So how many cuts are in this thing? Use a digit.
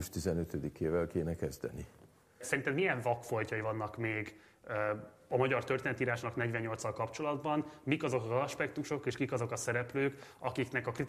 1